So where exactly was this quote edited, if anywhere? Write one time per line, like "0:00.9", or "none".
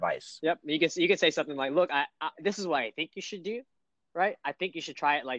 none